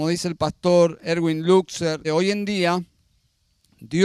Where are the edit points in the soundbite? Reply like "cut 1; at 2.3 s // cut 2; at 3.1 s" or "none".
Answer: cut 1; at 2.0 s